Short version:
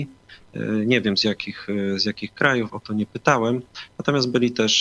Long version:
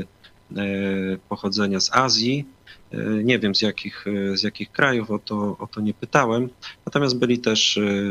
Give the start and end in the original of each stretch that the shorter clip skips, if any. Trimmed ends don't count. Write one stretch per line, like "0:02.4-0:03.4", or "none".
0:05.1-0:05.6